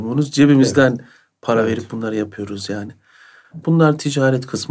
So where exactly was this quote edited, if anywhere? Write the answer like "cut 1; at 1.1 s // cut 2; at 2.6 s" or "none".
cut 1; at 3.6 s